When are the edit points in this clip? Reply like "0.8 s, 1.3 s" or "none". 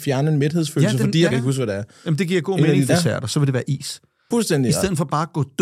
1.3 s, 2.9 s, 4.3 s